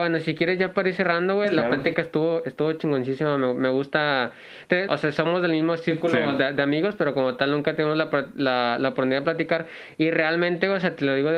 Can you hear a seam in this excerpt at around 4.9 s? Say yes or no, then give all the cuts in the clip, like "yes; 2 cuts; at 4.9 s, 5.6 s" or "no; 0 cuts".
yes; 1 cut; at 4.9 s